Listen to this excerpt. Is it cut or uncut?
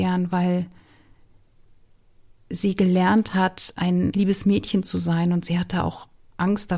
cut